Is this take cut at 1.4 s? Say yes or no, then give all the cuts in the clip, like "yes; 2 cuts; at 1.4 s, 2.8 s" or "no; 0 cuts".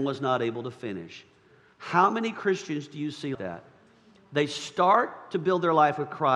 no; 1 cut; at 3.3 s